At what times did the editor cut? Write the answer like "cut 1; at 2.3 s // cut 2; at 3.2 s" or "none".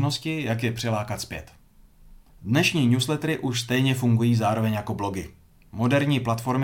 cut 1; at 2.3 s